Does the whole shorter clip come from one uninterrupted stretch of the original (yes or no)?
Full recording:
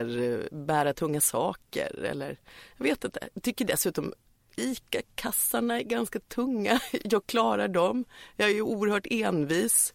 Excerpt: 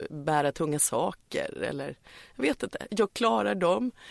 no